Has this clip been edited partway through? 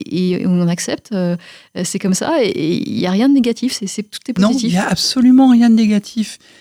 no; 0 cuts

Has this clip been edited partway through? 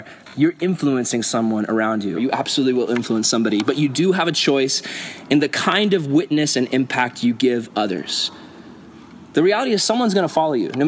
yes; 1 cut; at 2.2 s

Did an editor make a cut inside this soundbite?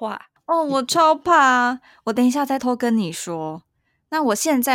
yes; 1 cut; at 2.6 s

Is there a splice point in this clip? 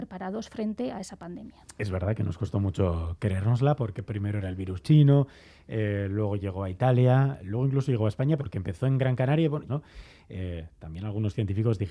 yes; 2 cuts; at 8.4 s, 9.7 s

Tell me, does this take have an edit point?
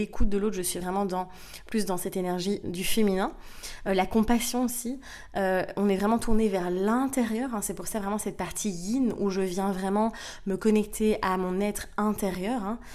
yes; 1 cut; at 2.6 s

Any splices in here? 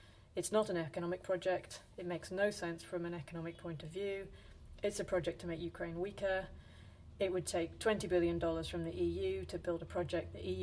no; 0 cuts

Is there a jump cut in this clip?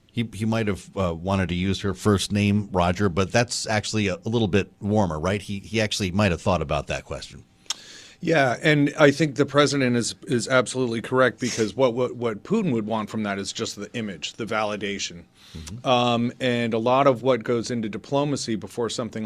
no; 0 cuts

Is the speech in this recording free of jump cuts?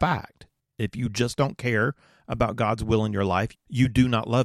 no; 1 cut; at 3.5 s

